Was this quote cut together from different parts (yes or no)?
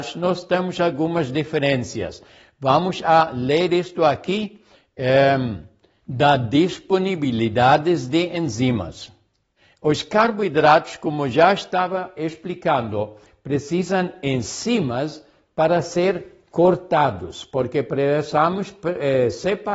no